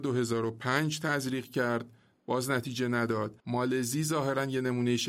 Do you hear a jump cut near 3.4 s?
yes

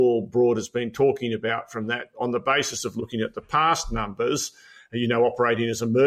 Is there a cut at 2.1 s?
yes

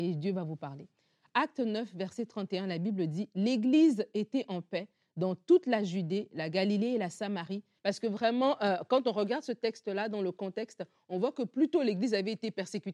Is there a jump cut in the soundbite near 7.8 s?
yes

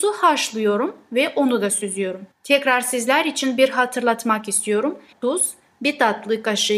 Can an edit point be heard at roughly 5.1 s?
yes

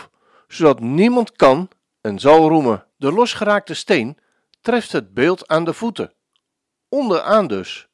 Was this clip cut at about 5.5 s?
no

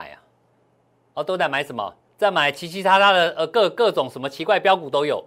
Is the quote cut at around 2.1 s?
yes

